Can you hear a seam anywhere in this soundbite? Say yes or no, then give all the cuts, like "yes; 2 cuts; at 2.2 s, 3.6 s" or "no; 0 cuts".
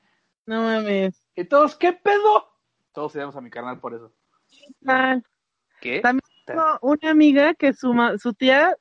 no; 0 cuts